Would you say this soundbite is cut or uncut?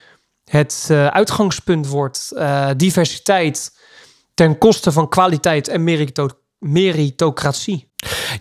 uncut